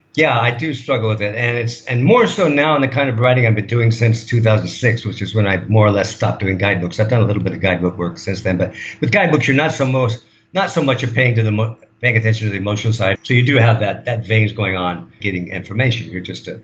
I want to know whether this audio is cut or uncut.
cut